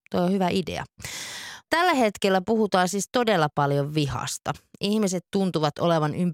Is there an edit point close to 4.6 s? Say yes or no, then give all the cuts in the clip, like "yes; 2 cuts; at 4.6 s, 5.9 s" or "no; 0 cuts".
no; 0 cuts